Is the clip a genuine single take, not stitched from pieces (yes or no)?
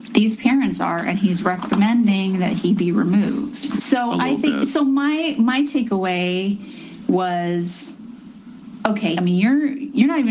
no